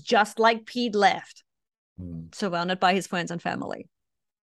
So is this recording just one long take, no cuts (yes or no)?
yes